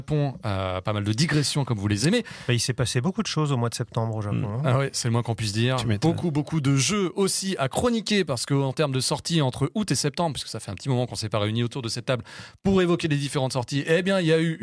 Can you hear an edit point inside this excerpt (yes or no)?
no